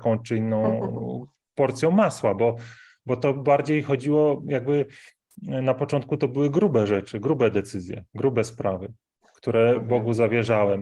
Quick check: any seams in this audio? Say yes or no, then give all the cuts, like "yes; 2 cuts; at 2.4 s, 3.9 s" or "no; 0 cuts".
no; 0 cuts